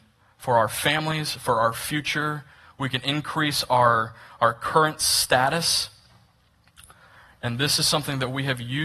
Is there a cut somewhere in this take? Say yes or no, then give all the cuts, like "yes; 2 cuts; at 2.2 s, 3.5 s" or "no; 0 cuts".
no; 0 cuts